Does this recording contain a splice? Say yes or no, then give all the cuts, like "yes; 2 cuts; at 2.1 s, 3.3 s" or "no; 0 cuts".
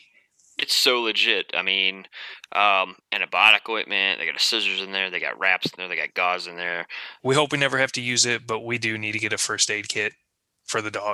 yes; 1 cut; at 7.2 s